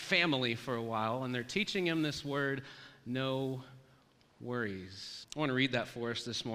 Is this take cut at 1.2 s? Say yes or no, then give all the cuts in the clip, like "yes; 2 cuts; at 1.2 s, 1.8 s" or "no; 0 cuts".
no; 1 cut; at 5.2 s